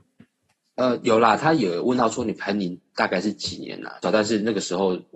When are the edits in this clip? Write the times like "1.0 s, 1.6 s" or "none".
4.0 s